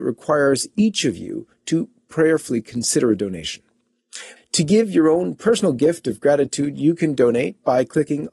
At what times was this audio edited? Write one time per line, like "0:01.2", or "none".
0:04.4